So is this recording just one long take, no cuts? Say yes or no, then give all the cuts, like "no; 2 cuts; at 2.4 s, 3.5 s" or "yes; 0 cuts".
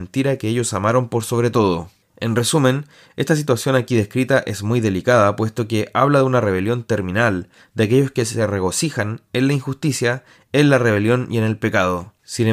yes; 0 cuts